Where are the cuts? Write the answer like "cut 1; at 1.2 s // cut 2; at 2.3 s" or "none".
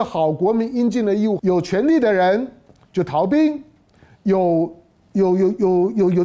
cut 1; at 1.4 s